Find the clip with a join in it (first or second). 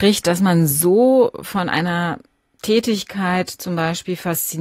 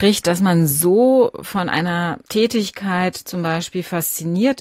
second